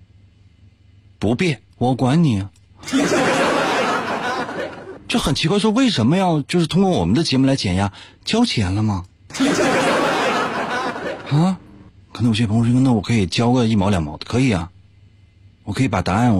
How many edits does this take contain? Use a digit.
1